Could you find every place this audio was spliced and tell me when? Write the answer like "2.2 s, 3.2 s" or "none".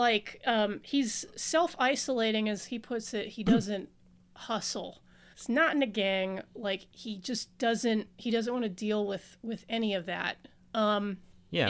5.3 s